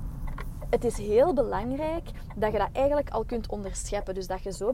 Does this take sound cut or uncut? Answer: uncut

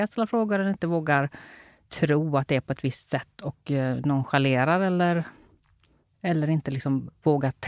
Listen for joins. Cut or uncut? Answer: uncut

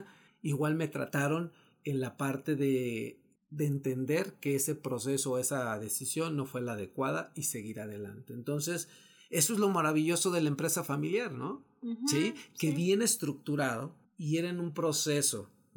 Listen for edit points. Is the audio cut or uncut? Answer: uncut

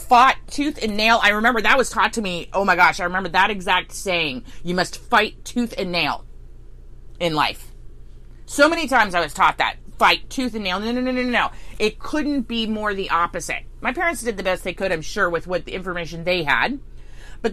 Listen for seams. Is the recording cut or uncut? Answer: uncut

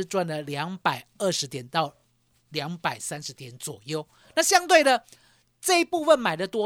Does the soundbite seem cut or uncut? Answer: uncut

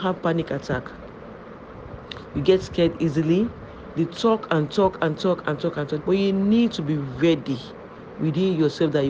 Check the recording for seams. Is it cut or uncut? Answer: cut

